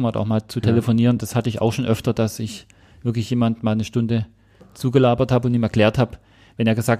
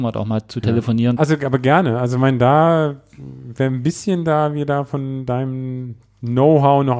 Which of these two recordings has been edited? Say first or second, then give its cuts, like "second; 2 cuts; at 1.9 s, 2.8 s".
second; 1 cut; at 1.2 s